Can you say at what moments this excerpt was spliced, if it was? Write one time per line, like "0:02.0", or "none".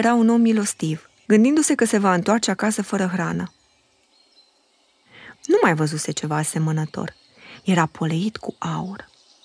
0:01.2
0:05.3